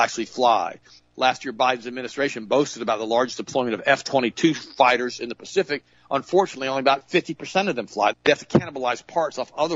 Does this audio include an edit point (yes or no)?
yes